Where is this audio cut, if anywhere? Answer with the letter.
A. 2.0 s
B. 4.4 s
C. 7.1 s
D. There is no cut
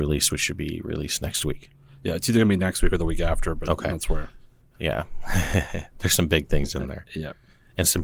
D